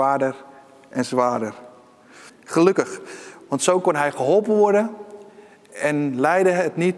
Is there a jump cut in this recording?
yes; 1 cut; at 2.3 s

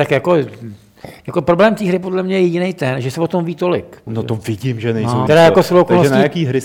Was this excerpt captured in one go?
no; 2 cuts; at 4.1 s, 5.3 s

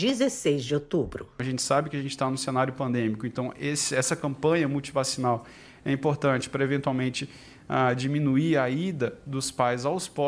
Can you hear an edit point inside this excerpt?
no; 0 cuts

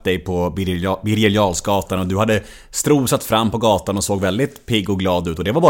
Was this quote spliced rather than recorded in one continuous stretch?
no; 0 cuts

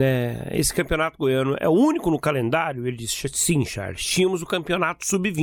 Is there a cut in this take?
no; 0 cuts

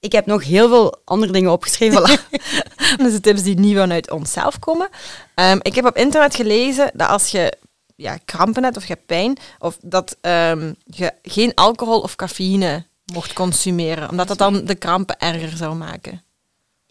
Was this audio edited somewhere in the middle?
yes; 2 cuts; at 1.9 s, 3.0 s

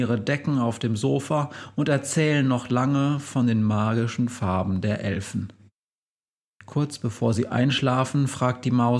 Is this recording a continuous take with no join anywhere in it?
yes; 0 cuts

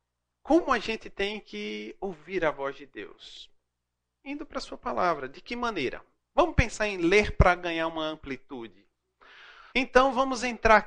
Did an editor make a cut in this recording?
yes; 1 cut; at 9.7 s

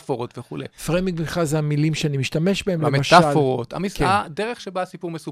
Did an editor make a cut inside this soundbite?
no; 0 cuts

